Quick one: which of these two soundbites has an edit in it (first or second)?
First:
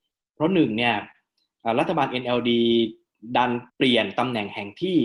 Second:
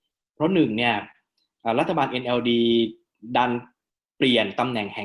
first